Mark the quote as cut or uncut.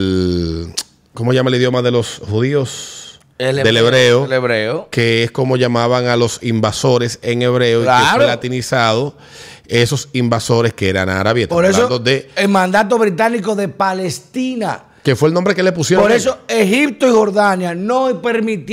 uncut